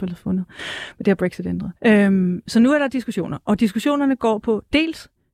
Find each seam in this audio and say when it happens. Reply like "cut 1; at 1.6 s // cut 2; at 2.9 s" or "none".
cut 1; at 1.8 s